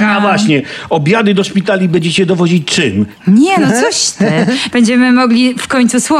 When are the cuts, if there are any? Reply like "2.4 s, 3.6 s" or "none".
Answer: 3.2 s, 4.7 s